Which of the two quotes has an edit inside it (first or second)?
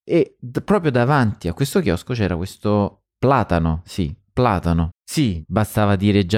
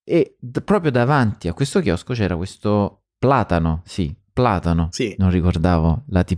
first